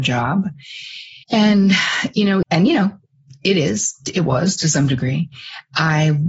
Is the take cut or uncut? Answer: cut